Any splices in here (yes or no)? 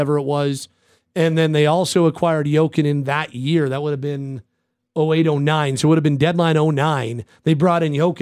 no